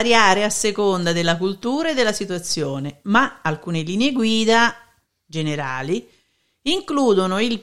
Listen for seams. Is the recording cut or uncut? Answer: uncut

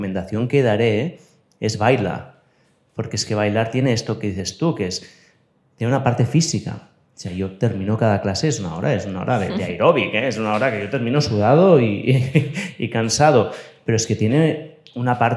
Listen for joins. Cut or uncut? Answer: uncut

